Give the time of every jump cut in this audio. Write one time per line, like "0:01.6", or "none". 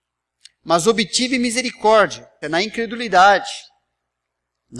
0:02.4